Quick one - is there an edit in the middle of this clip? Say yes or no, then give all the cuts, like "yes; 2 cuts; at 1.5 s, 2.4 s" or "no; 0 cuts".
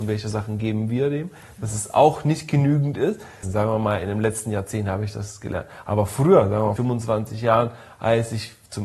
yes; 2 cuts; at 3.4 s, 6.8 s